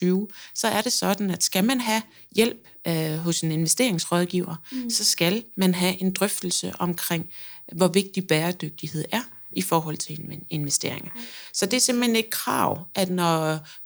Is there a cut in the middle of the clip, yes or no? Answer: no